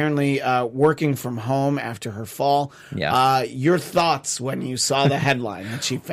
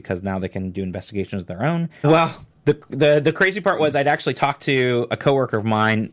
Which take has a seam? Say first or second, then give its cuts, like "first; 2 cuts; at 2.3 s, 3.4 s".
second; 1 cut; at 2.0 s